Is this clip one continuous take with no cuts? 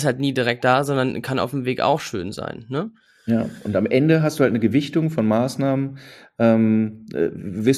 yes; 0 cuts

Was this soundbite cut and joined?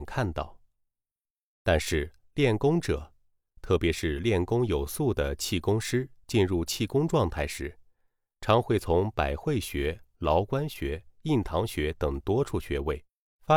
no; 0 cuts

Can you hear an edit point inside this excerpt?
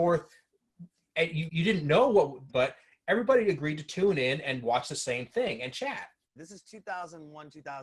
yes; 3 cuts; at 1.5 s, 2.5 s, 6.4 s

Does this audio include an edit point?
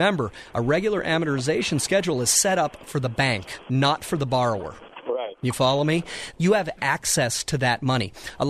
yes; 1 cut; at 6.3 s

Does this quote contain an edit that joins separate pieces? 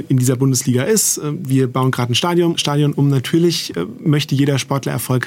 yes; 1 cut; at 2.5 s

